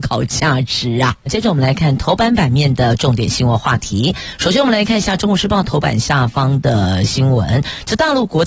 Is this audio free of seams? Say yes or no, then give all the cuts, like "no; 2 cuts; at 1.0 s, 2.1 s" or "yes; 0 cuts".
yes; 0 cuts